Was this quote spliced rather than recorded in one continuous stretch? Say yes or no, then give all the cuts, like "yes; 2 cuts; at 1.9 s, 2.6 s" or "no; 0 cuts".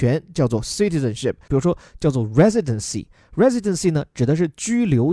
yes; 1 cut; at 1.5 s